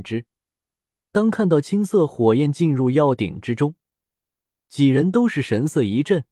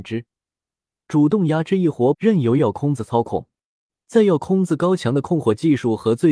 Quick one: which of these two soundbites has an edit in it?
second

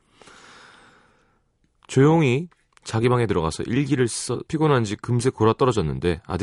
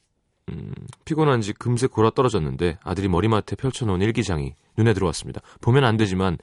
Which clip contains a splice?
first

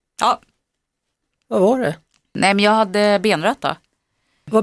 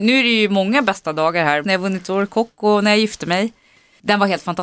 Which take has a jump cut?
second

